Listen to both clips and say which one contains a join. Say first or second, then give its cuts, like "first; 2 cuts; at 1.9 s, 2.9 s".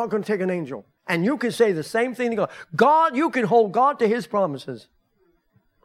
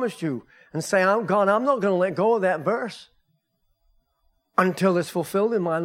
first; 1 cut; at 1.0 s